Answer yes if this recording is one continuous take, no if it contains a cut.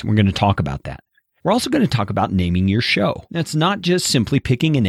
no